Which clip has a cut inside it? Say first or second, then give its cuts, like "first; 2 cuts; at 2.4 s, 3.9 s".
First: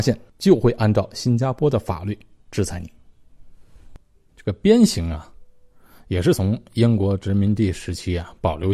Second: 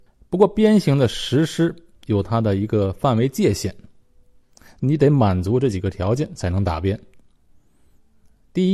first; 1 cut; at 4.1 s